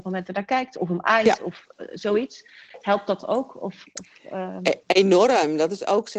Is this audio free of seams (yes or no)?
yes